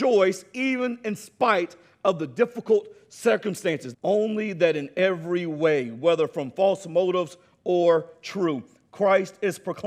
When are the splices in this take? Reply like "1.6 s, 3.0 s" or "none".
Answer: 3.9 s

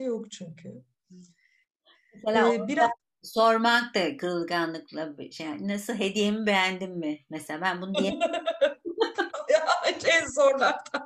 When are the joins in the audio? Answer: none

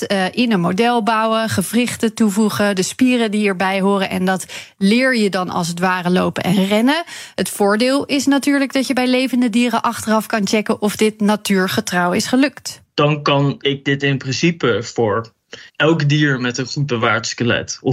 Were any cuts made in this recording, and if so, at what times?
12.8 s, 15.7 s

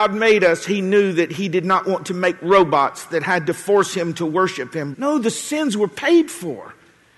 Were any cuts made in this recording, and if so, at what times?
4.9 s

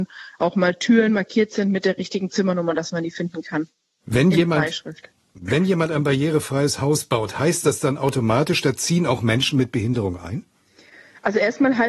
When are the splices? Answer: none

